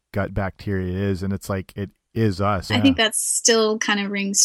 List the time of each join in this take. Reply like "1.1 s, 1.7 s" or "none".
2.7 s